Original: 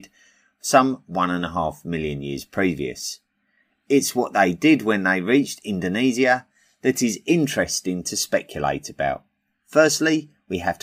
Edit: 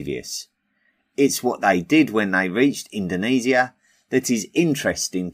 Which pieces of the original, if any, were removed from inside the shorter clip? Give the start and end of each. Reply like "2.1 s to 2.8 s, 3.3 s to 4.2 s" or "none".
none